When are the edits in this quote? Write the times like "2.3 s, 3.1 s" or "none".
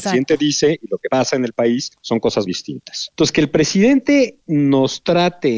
2.5 s